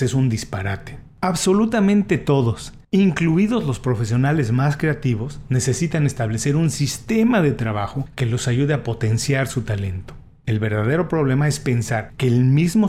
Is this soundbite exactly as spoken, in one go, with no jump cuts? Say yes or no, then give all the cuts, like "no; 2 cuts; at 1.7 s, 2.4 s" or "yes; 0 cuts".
no; 1 cut; at 2.8 s